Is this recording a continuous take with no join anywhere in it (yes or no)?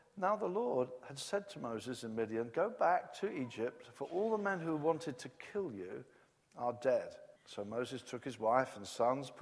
no